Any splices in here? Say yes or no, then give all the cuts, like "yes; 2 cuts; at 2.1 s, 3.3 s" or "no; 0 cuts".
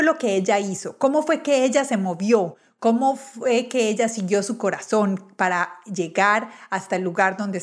no; 0 cuts